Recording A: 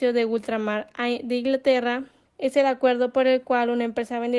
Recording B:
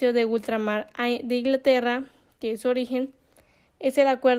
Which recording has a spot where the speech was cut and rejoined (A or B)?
A